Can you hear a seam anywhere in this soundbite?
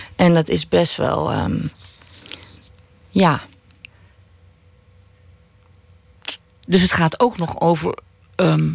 no; 0 cuts

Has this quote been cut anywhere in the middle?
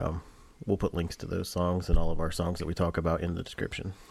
no; 0 cuts

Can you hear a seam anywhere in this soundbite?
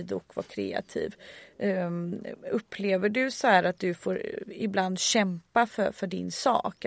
no; 0 cuts

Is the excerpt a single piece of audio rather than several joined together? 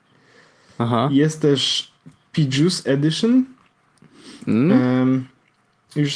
yes; 0 cuts

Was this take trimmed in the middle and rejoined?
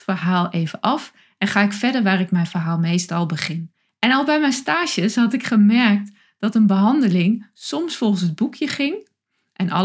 yes; 1 cut; at 3.9 s

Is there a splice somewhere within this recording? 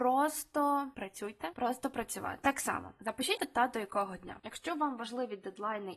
yes; 2 cuts; at 1.5 s, 3.4 s

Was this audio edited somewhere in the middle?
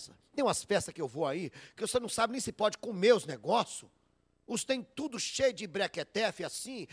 no; 0 cuts

